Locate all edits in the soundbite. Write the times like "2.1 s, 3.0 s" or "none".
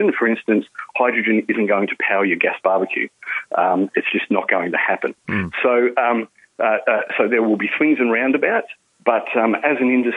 none